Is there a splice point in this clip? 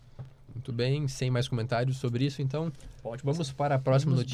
no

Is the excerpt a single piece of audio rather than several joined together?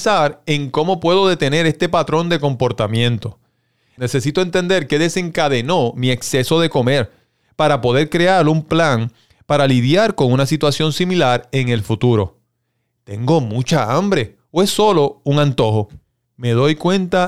no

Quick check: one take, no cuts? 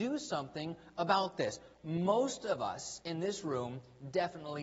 yes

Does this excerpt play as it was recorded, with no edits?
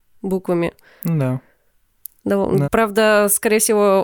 no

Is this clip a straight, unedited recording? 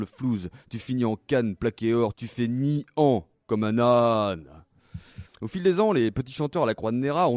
no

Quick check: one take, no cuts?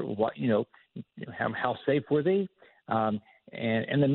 yes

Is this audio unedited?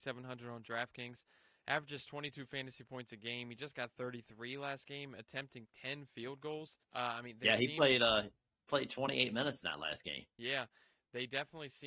no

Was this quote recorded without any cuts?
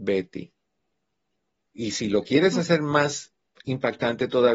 no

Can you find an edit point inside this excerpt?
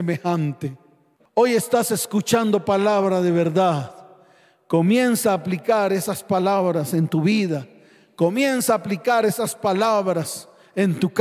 yes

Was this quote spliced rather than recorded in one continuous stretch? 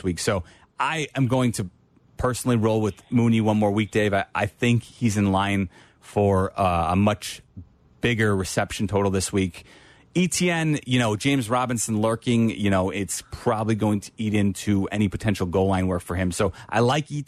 no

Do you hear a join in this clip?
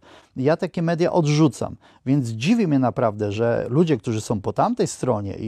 no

